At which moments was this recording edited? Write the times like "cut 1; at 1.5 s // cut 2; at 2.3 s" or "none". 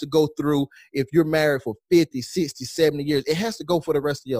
none